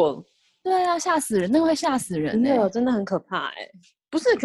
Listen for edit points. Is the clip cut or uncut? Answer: uncut